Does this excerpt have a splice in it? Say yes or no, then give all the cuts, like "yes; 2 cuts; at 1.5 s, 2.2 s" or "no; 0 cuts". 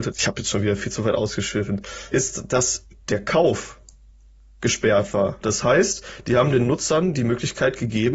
yes; 2 cuts; at 2.1 s, 5.4 s